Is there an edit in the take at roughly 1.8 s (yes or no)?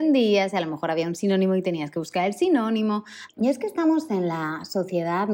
no